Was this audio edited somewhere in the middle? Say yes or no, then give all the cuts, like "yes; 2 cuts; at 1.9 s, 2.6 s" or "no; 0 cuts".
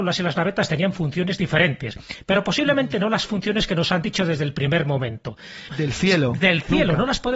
yes; 1 cut; at 5.7 s